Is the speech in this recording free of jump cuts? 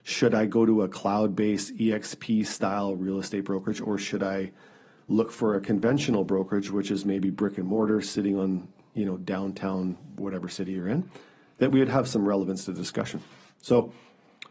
yes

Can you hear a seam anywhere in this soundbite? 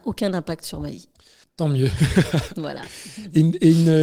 yes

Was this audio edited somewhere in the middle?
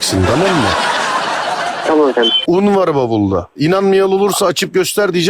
yes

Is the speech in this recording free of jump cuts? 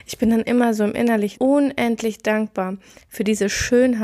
no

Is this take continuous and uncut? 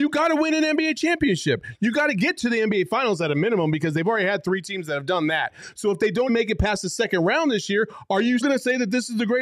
no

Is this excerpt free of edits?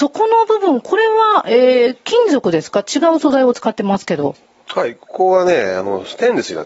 yes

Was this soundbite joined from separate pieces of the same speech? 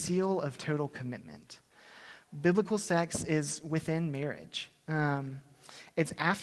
no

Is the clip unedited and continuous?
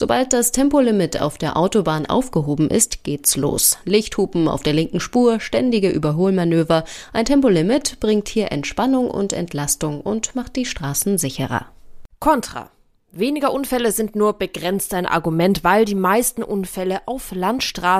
yes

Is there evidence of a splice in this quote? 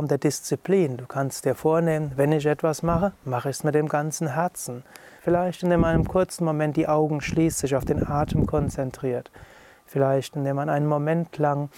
yes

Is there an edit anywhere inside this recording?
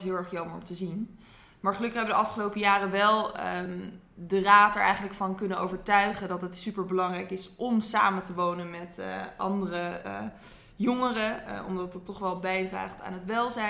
no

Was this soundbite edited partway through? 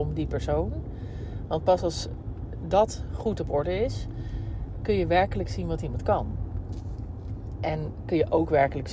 no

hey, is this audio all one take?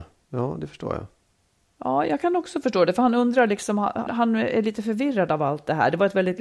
no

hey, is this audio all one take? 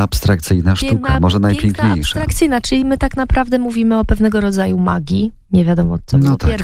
no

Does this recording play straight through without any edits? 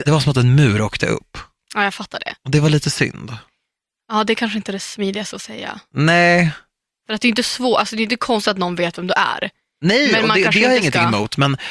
yes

